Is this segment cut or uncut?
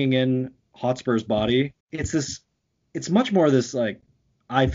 cut